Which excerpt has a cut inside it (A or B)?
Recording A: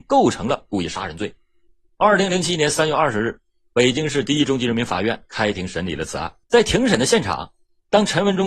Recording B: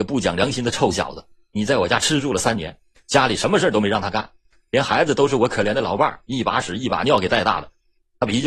A